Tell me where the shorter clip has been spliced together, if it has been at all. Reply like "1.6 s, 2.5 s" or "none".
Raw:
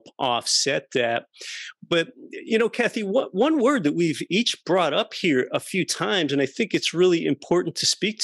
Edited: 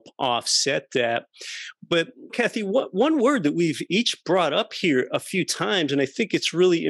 2.3 s